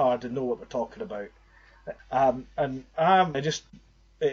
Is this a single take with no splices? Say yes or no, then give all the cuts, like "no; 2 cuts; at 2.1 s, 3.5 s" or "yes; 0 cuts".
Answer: no; 2 cuts; at 2.0 s, 3.3 s